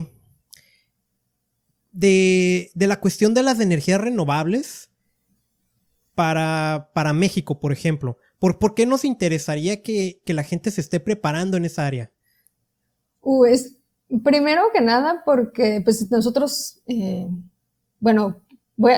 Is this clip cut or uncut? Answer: uncut